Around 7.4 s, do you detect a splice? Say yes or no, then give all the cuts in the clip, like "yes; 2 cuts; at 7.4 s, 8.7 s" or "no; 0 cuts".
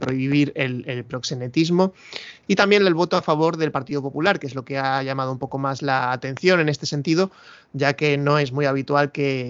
no; 1 cut; at 2.4 s